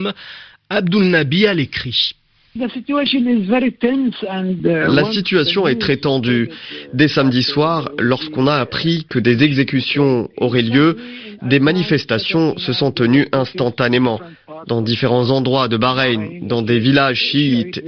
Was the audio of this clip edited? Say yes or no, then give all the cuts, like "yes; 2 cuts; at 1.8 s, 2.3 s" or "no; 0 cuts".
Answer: no; 0 cuts